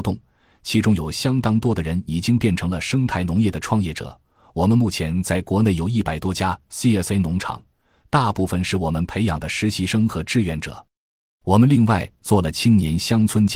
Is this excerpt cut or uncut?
uncut